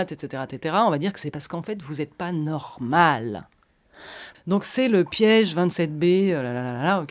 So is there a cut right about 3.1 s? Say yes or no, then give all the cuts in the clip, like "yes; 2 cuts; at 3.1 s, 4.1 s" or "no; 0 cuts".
no; 1 cut; at 4.3 s